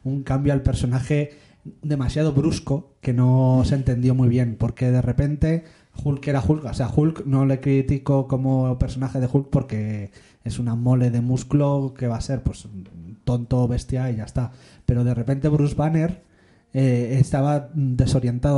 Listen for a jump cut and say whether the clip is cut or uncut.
uncut